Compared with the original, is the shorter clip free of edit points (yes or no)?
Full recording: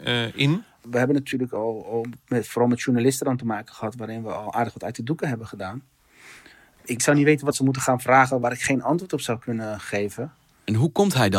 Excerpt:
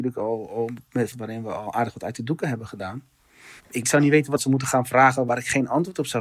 no